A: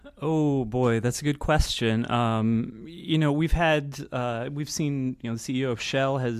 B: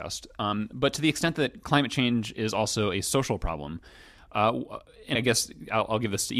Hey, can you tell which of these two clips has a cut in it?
B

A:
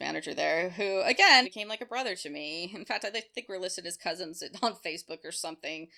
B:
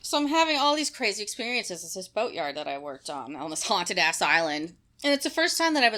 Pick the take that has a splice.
A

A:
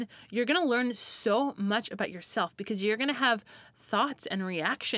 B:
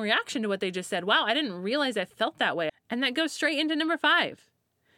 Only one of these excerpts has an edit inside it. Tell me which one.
B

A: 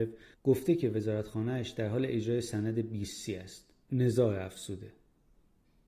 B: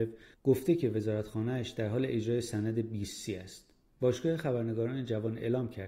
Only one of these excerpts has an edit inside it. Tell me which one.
A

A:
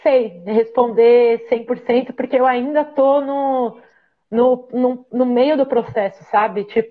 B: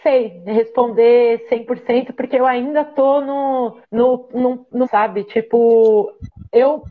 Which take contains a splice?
B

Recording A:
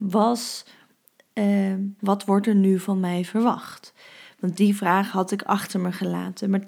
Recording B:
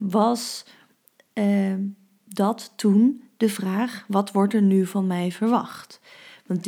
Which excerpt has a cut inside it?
A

